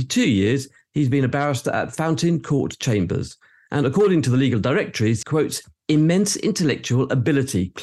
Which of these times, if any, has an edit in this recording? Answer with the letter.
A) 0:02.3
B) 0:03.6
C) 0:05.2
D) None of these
C